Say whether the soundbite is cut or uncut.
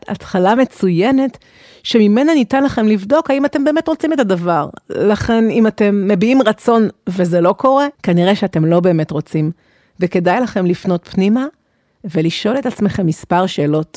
cut